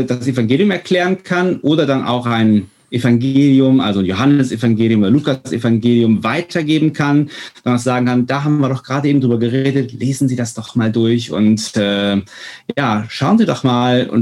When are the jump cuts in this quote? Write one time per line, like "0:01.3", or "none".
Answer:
none

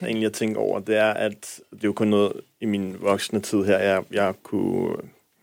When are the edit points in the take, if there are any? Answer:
none

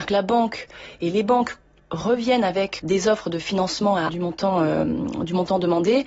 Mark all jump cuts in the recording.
0:02.8
0:04.1

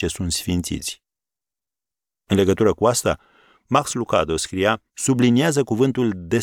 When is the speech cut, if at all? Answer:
0:04.9

